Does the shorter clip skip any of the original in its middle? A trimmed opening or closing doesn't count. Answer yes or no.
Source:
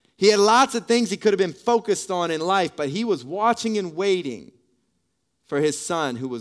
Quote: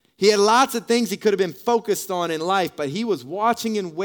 no